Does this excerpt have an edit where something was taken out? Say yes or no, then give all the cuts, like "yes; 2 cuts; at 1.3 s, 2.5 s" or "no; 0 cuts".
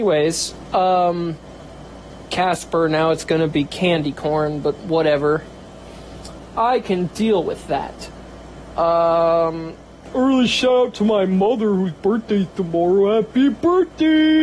no; 0 cuts